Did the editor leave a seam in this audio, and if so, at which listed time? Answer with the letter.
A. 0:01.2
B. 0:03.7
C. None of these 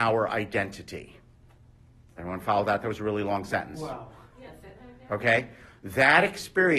C